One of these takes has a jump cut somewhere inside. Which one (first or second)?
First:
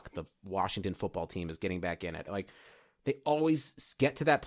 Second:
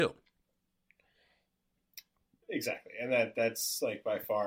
first